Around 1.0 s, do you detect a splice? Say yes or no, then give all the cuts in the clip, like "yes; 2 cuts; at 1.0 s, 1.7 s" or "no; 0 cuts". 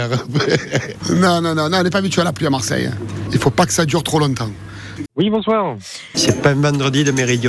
no; 2 cuts; at 5.1 s, 6.1 s